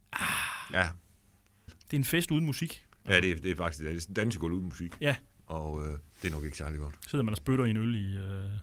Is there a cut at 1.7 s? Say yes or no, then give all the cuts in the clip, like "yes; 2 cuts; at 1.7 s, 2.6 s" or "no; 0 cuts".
yes; 2 cuts; at 1.7 s, 6.1 s